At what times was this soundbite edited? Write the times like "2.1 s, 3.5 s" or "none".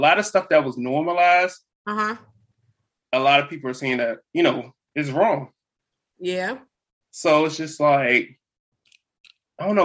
none